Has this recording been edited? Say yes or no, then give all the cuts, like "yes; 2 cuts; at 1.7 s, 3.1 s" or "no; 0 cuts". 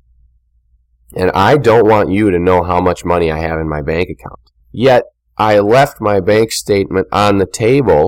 yes; 1 cut; at 4.6 s